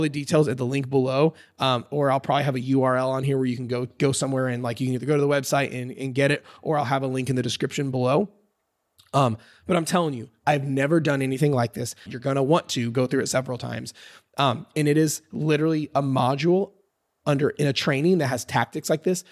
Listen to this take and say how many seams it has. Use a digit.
1